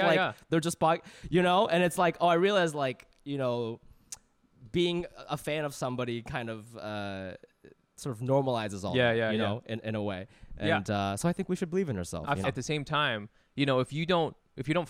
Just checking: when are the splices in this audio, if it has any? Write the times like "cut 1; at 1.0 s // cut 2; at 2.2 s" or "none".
cut 1; at 12.4 s